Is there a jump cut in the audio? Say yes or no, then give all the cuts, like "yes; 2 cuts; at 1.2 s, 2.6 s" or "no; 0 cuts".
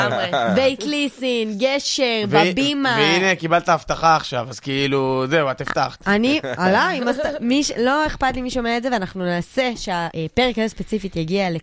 yes; 1 cut; at 10.1 s